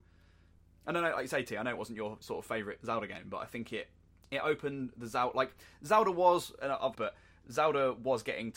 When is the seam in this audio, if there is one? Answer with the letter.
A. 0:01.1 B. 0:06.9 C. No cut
B